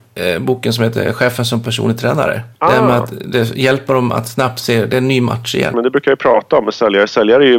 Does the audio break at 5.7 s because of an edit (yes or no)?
yes